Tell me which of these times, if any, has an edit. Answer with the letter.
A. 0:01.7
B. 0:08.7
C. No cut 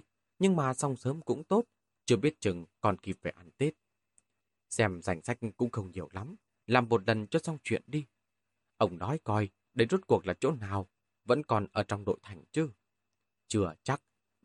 C